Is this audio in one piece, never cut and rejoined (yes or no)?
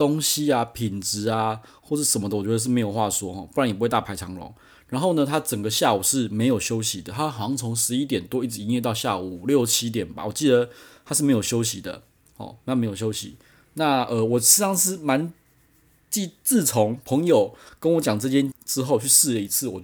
no